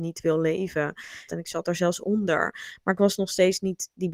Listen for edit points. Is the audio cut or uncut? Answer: cut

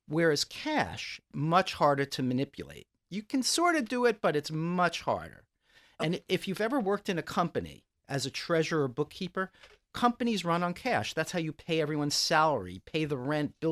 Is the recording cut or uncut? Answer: uncut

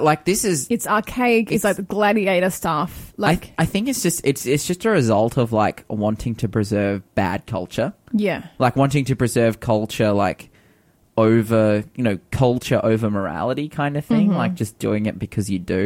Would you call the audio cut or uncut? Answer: uncut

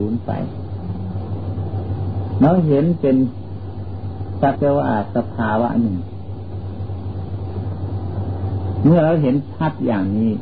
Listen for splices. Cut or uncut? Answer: cut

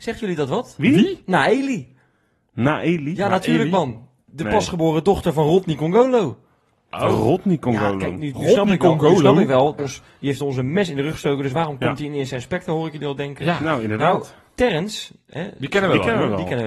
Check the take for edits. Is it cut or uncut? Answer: cut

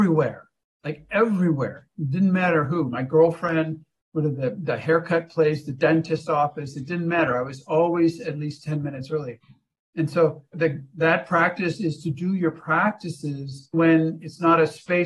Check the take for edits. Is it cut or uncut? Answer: cut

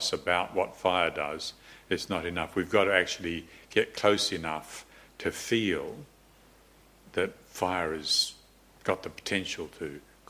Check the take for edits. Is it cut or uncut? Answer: uncut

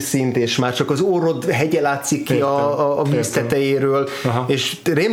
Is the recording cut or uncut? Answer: uncut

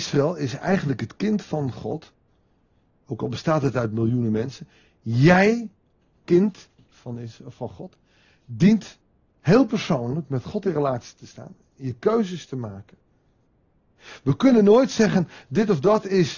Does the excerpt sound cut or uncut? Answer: uncut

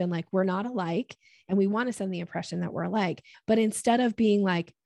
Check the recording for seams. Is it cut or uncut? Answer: cut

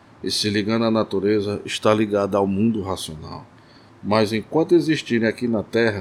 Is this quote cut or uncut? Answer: cut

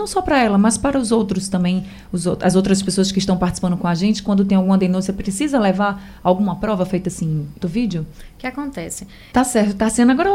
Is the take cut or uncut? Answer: cut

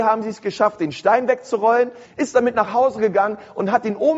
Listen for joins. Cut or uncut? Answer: cut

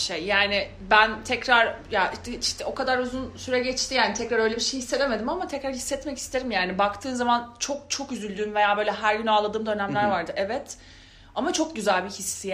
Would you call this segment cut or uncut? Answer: uncut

